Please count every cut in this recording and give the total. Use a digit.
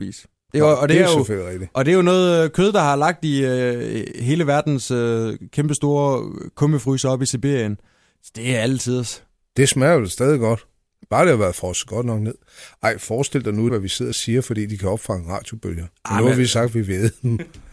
1